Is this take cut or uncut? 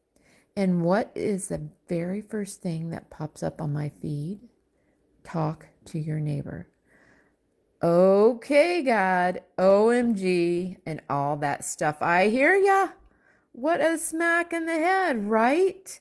uncut